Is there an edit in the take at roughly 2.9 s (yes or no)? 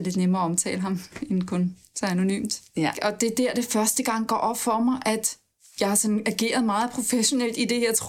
yes